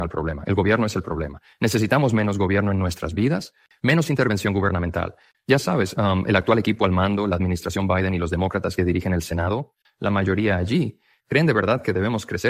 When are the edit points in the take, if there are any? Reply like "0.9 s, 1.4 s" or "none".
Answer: none